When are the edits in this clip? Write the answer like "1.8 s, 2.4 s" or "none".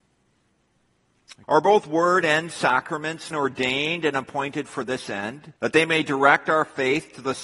1.4 s, 3.3 s, 5.6 s